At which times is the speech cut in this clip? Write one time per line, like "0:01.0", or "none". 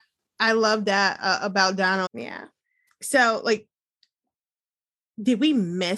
0:02.1